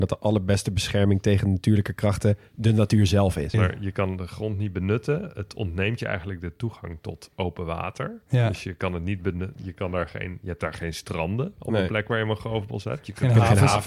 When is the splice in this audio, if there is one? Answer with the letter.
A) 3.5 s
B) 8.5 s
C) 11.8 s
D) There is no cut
A